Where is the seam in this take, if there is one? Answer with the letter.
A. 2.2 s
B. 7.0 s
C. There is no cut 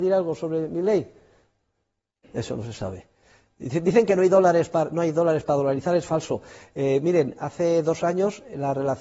A